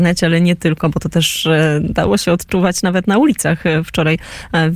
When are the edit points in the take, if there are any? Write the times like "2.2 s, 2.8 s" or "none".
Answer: none